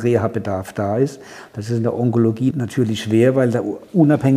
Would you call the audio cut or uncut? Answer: cut